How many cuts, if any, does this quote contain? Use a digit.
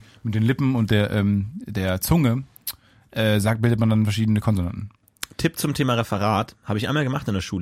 0